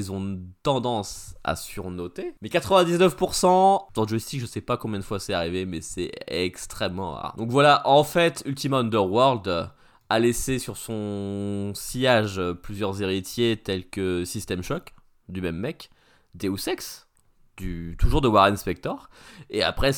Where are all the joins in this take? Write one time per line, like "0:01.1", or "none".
none